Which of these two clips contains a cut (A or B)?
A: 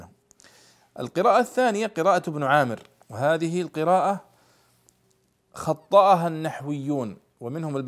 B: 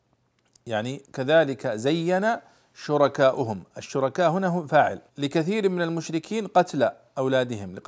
B